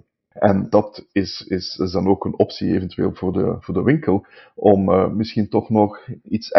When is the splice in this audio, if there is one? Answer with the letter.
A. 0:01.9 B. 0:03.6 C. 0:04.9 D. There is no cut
B